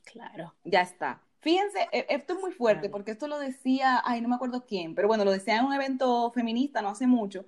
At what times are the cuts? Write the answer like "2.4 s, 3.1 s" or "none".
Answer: 1.2 s